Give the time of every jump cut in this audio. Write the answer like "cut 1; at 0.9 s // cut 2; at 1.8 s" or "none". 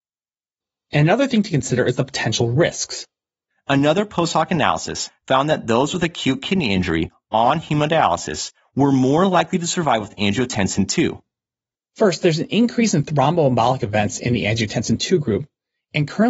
cut 1; at 3.5 s // cut 2; at 11.7 s